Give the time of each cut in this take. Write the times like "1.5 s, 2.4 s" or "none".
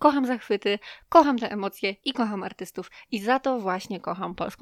none